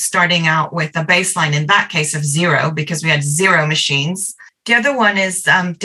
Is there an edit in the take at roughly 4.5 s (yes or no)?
yes